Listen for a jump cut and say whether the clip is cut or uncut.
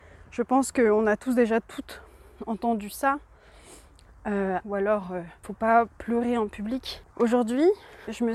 cut